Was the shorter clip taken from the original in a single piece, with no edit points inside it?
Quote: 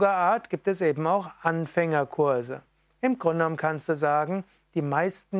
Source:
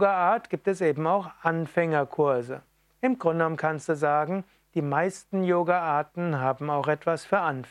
yes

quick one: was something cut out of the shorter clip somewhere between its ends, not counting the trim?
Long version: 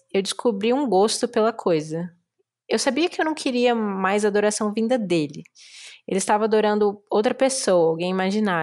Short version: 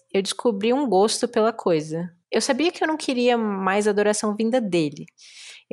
yes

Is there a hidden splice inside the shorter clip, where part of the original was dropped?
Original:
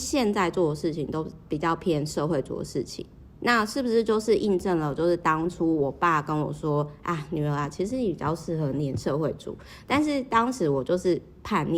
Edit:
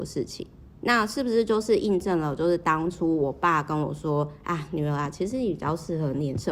no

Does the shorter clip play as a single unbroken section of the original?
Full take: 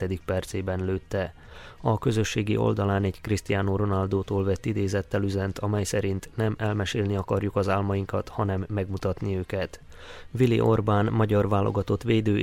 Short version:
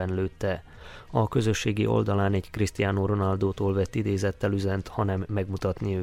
no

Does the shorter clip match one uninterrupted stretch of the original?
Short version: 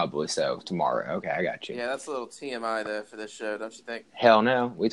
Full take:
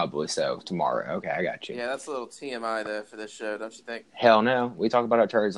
yes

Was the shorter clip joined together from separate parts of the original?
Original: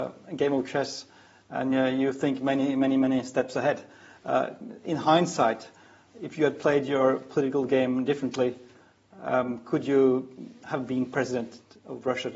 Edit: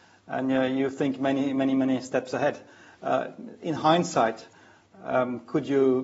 yes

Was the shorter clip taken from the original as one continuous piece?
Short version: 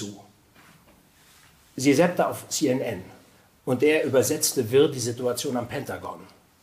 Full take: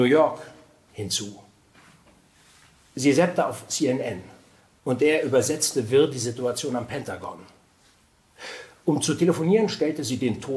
yes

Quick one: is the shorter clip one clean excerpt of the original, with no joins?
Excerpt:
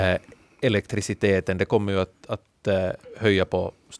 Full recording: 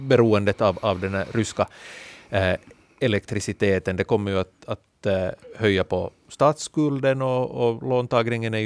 yes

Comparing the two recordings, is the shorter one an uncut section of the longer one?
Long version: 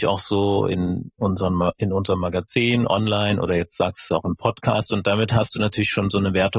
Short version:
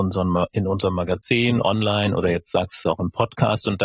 yes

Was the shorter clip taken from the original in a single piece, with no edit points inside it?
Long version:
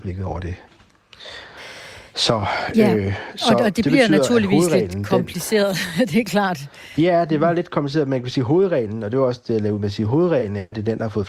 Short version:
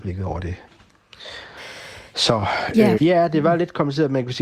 no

